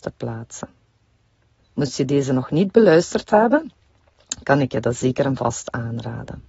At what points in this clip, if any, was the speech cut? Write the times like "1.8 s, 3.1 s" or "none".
1.6 s